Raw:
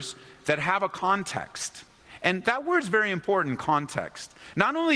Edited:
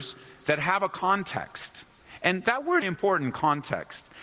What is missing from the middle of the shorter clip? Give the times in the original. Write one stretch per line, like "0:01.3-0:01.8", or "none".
0:02.8-0:03.1